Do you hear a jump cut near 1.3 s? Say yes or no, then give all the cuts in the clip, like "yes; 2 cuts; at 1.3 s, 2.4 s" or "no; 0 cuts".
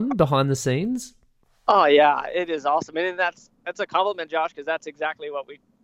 no; 0 cuts